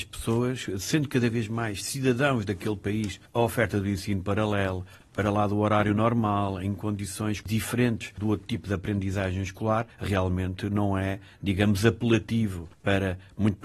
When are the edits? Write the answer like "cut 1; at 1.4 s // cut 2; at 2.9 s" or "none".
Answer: none

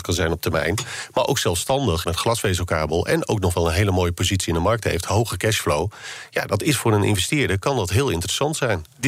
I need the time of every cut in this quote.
cut 1; at 2.0 s

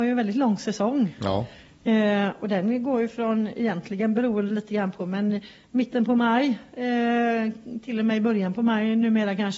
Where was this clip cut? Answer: none

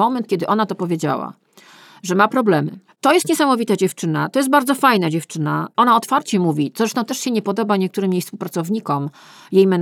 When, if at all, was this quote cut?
cut 1; at 2.9 s

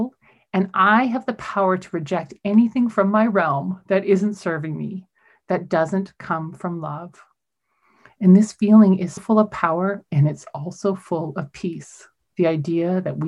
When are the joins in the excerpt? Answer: cut 1; at 9.2 s

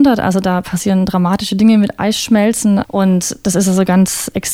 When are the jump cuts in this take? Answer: cut 1; at 2.8 s

